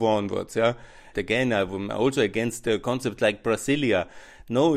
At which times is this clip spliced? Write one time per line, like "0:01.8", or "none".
0:01.1